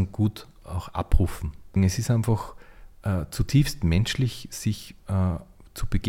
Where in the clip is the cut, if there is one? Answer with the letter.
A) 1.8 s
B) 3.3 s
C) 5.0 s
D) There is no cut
A